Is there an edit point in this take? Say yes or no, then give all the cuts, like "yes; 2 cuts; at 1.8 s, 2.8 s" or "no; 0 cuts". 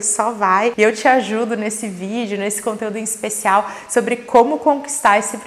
no; 0 cuts